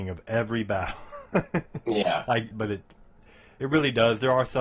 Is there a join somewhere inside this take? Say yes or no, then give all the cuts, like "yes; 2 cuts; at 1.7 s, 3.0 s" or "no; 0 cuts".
yes; 1 cut; at 2.5 s